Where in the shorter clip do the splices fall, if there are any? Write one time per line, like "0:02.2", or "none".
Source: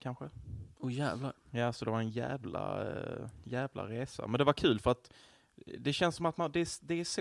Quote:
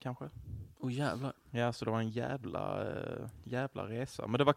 none